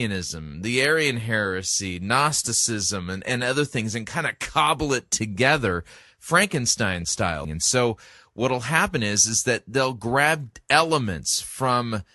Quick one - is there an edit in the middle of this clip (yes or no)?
yes